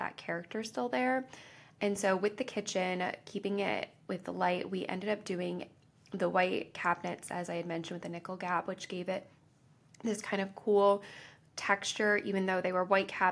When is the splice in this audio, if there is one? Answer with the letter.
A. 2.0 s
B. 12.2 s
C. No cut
C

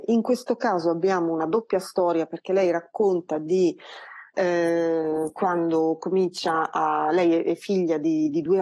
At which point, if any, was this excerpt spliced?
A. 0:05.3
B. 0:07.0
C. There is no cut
C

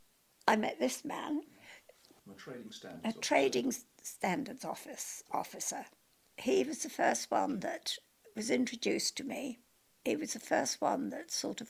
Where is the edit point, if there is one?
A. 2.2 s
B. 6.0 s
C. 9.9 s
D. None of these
A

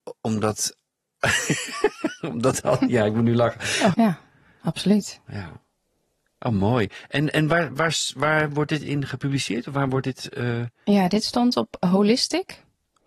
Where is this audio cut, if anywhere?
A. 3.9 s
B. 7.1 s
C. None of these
A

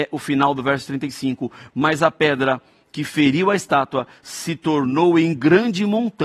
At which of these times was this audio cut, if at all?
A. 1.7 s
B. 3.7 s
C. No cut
C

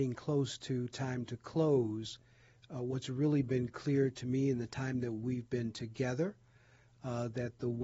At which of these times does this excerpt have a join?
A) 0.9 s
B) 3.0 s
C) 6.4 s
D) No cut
D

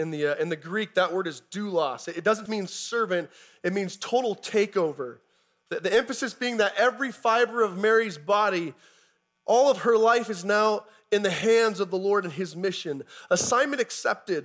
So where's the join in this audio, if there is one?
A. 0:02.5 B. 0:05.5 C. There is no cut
A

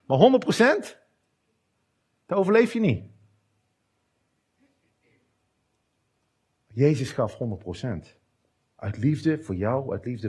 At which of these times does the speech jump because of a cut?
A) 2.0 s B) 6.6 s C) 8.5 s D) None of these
D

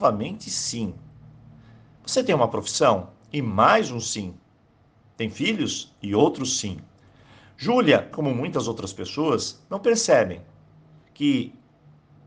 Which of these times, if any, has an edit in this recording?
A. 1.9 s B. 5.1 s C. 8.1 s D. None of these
C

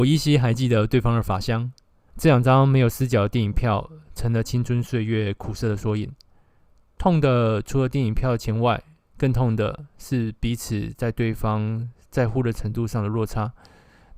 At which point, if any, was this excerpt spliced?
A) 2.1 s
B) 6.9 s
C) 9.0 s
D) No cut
A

